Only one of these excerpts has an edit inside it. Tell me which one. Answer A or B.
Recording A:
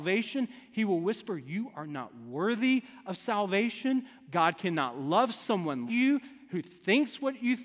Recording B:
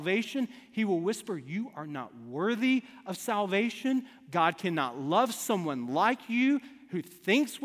A